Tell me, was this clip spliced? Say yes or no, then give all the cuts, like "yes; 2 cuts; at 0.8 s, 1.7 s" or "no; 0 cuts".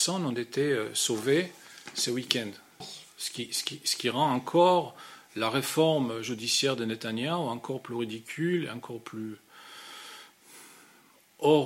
yes; 1 cut; at 2.8 s